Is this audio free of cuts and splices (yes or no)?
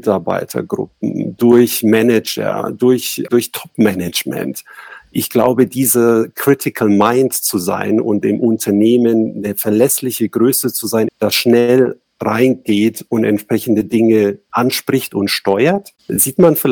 no